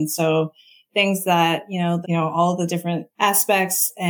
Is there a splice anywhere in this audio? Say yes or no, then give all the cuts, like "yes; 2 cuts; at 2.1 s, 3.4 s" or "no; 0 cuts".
yes; 1 cut; at 2.0 s